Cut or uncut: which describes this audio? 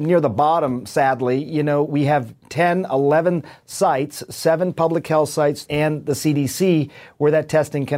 cut